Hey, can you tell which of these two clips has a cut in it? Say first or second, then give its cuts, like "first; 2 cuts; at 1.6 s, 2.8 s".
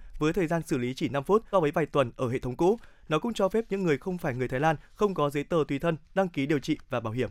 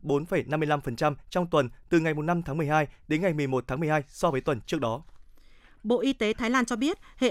first; 1 cut; at 1.5 s